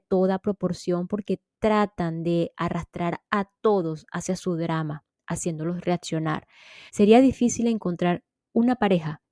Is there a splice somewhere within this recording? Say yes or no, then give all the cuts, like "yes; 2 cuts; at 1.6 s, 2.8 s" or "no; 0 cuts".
yes; 1 cut; at 6.9 s